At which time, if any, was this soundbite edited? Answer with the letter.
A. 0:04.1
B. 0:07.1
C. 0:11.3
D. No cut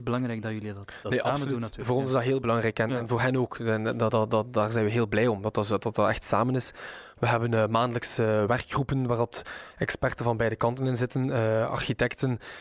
D